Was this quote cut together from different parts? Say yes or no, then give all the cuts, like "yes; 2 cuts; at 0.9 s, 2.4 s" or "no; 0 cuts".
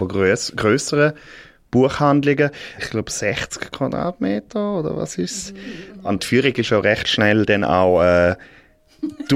yes; 2 cuts; at 2.8 s, 6.2 s